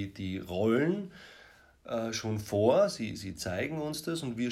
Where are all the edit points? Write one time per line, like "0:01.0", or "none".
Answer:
none